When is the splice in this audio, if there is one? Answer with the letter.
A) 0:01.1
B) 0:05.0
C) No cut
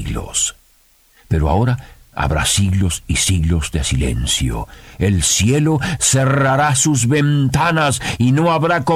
C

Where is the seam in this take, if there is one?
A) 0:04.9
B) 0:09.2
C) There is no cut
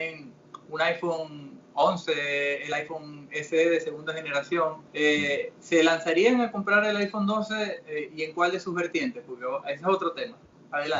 A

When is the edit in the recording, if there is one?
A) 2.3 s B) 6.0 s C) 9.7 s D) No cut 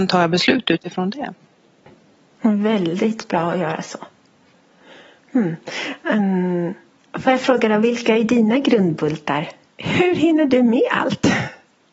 C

